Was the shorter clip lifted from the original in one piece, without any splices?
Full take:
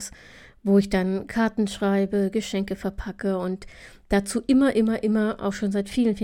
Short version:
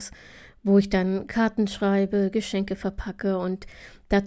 yes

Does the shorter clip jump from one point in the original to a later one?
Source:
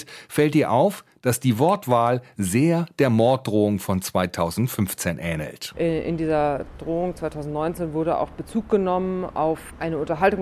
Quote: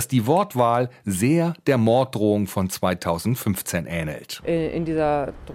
no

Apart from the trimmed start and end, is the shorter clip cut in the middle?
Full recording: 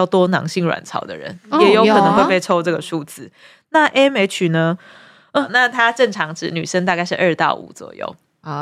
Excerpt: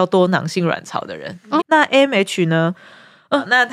yes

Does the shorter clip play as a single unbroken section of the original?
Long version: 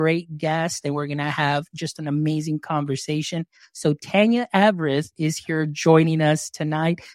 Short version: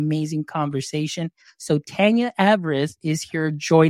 yes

